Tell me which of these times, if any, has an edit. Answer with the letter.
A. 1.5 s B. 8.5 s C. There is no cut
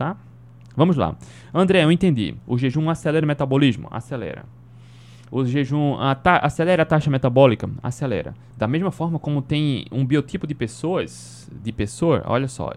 B